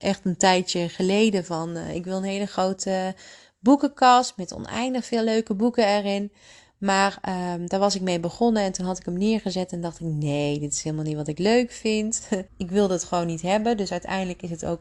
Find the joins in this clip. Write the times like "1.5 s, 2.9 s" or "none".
12.5 s